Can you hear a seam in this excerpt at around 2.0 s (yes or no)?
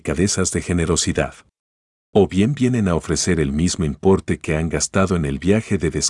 yes